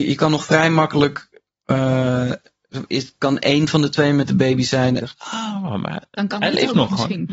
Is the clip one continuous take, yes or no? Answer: no